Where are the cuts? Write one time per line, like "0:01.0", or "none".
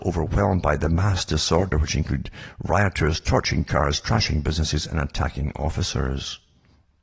none

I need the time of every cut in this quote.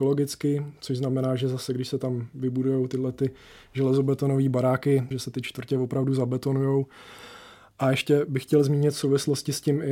0:05.1

